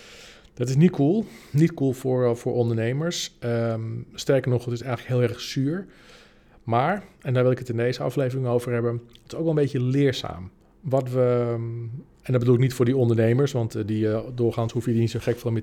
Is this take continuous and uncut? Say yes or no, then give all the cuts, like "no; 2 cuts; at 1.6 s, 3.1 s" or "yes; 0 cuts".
yes; 0 cuts